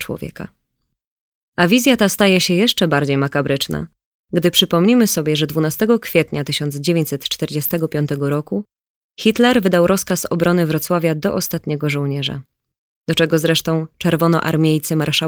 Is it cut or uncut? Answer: uncut